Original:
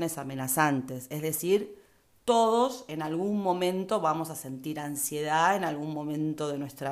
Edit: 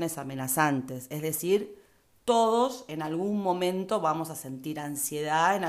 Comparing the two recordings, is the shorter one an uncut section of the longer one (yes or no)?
yes